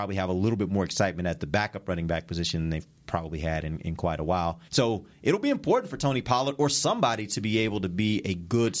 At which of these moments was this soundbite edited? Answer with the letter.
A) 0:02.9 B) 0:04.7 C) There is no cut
B